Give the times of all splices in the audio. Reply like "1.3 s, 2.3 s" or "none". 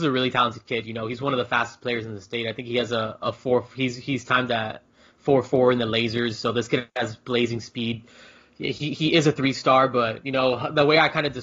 none